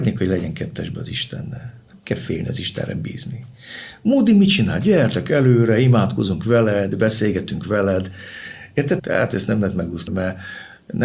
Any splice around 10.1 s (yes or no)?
yes